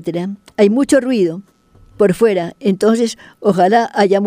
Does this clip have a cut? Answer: no; 0 cuts

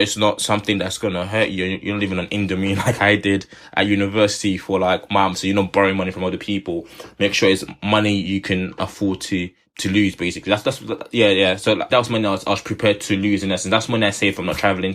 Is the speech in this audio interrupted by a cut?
yes; 1 cut; at 11.9 s

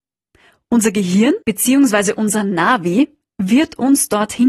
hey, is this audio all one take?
no; 1 cut; at 1.4 s

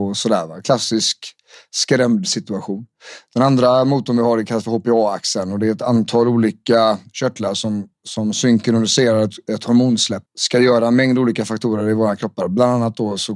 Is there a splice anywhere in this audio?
yes; 1 cut; at 10.3 s

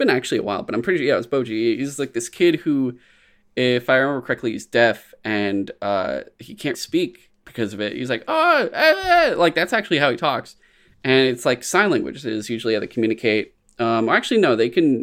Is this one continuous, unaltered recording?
no; 1 cut; at 6.7 s

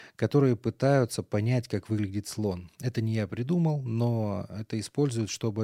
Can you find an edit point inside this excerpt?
no; 0 cuts

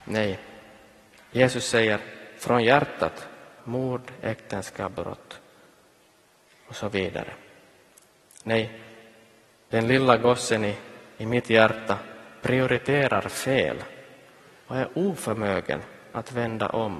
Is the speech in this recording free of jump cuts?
no; 1 cut; at 3.6 s

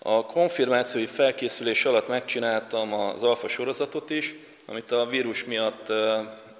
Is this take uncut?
yes; 0 cuts

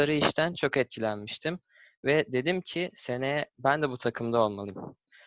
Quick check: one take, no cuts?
yes; 0 cuts

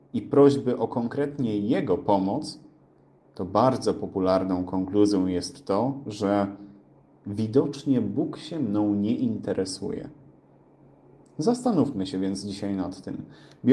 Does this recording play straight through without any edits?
yes; 0 cuts

